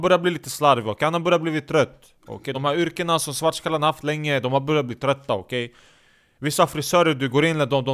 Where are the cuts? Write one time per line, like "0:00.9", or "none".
none